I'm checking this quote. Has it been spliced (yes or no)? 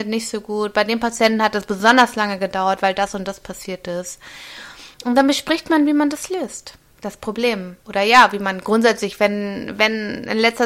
yes